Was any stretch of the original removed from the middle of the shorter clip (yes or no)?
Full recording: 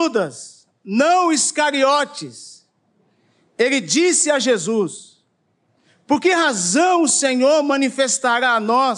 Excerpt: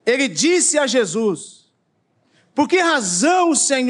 no